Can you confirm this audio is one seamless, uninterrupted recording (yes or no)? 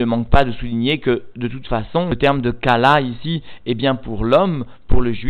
yes